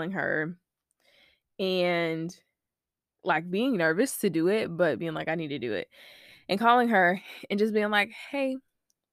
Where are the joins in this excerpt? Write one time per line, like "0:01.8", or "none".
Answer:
none